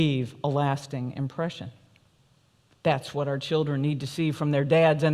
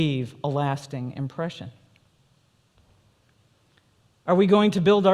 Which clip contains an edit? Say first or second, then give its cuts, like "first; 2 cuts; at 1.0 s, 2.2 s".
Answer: first; 1 cut; at 2.7 s